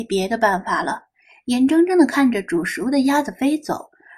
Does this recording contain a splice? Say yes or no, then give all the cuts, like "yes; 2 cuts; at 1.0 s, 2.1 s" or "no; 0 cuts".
no; 0 cuts